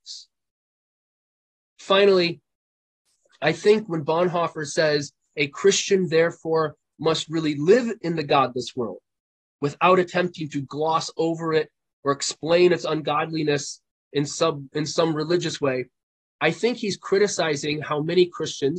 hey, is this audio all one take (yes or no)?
yes